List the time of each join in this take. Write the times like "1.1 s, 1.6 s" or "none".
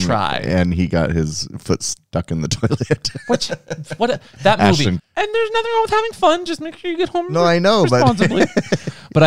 5.0 s